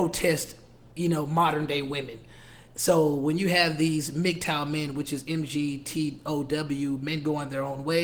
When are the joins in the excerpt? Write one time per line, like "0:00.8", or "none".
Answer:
none